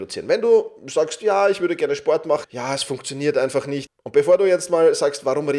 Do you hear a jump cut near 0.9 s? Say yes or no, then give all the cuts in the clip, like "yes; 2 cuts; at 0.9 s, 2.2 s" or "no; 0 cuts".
no; 2 cuts; at 2.4 s, 3.9 s